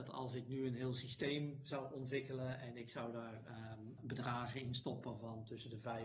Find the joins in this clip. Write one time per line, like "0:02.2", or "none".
0:04.0